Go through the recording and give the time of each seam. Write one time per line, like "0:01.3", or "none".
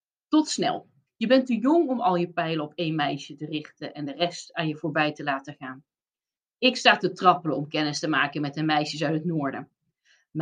0:01.1